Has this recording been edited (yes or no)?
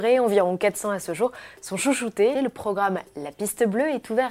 yes